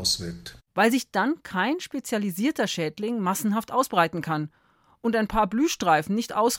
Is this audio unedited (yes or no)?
yes